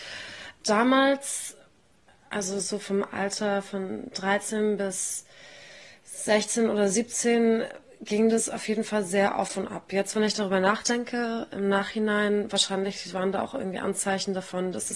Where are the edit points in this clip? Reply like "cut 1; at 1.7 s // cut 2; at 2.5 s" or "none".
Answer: none